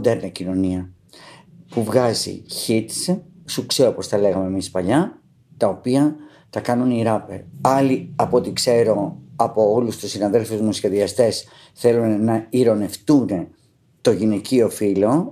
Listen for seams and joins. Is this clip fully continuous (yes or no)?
no